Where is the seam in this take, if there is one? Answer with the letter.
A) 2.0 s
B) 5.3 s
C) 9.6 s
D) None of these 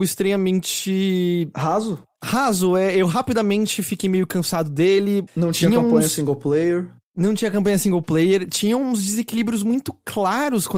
B